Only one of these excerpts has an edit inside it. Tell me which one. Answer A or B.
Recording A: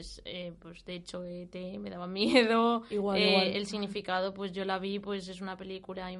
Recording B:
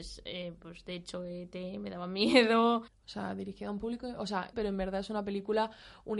B